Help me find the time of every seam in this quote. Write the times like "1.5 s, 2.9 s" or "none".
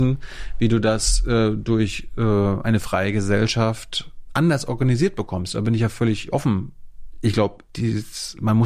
none